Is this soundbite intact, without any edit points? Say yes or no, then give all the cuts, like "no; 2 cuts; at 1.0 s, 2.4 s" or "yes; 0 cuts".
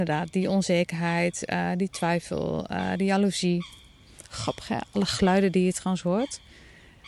yes; 0 cuts